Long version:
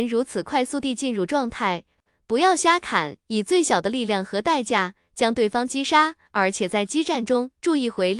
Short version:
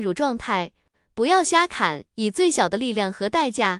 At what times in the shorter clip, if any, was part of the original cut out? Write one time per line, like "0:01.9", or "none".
none